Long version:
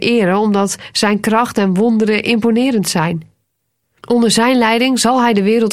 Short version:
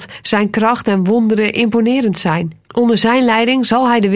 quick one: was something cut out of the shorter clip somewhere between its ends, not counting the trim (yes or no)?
yes